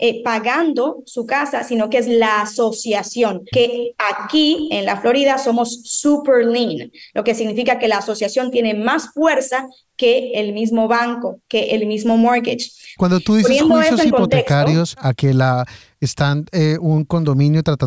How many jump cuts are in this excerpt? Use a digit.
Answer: 3